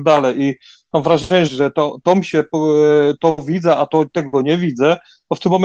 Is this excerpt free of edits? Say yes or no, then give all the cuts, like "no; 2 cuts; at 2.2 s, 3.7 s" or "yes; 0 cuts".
no; 1 cut; at 1.5 s